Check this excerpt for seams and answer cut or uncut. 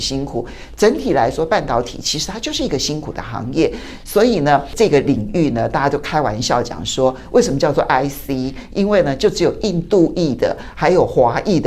uncut